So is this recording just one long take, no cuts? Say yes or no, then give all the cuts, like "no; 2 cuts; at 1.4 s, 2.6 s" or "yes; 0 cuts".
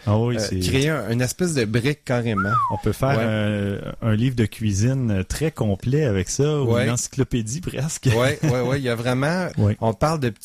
no; 1 cut; at 9.5 s